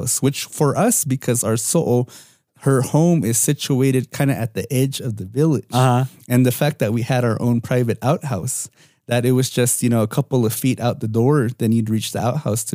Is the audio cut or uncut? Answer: uncut